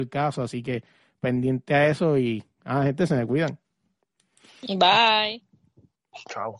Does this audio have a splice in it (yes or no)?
no